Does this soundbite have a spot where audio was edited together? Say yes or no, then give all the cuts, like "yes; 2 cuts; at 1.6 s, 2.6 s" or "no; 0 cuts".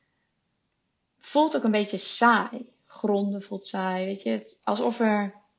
yes; 1 cut; at 4.6 s